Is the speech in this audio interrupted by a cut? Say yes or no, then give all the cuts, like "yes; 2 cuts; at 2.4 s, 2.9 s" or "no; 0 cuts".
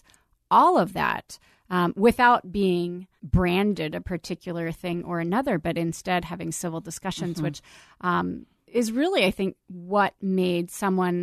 yes; 1 cut; at 3.2 s